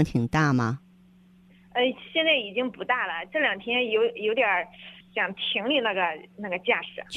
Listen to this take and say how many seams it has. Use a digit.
0